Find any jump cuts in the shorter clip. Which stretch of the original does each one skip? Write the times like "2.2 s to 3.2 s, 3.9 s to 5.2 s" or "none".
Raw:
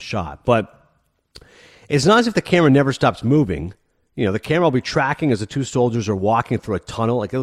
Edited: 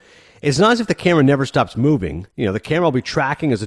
3.8 s to 4.1 s